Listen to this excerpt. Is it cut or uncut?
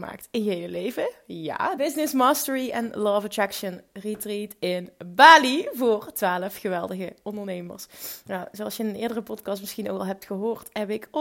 cut